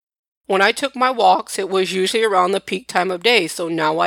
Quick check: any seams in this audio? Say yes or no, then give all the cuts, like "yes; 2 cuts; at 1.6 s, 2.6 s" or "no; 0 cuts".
no; 0 cuts